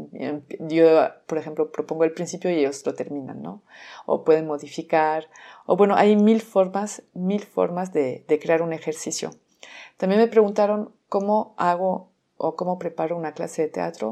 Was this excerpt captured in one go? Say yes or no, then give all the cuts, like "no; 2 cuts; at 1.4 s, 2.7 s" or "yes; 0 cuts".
yes; 0 cuts